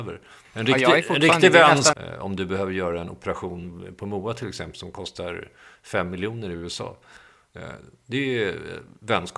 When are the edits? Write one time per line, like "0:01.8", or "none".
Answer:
0:01.9